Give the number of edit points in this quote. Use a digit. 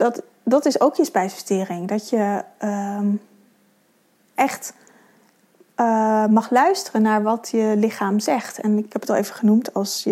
0